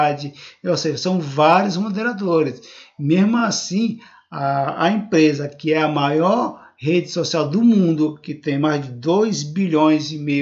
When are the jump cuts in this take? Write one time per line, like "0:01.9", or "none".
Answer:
none